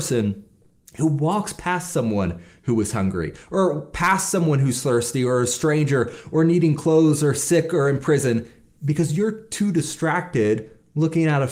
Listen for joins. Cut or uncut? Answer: uncut